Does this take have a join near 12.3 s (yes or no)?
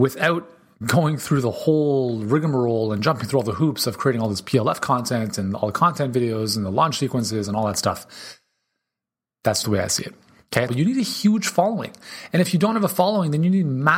no